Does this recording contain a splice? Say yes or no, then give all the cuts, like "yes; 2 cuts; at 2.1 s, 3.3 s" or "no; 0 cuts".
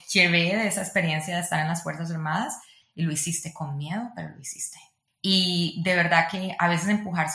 yes; 2 cuts; at 2.8 s, 5.1 s